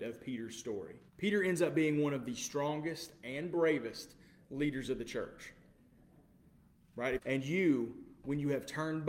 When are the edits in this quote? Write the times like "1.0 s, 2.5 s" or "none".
1.1 s, 7.2 s